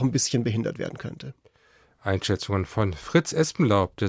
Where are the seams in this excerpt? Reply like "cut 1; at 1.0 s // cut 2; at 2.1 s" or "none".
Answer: none